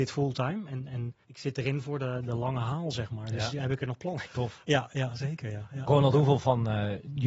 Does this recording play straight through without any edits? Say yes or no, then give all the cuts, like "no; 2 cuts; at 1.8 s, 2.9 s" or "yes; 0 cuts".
no; 2 cuts; at 1.2 s, 4.3 s